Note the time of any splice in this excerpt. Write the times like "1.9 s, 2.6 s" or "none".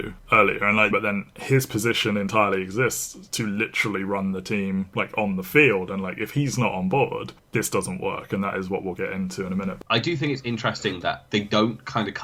0.9 s